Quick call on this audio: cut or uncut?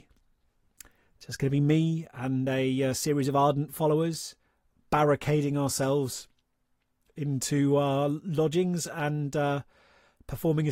uncut